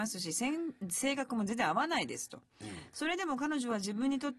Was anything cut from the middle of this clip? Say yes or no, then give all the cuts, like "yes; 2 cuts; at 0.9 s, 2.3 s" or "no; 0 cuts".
no; 0 cuts